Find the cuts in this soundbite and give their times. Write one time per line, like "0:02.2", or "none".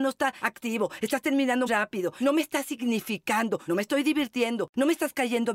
0:01.7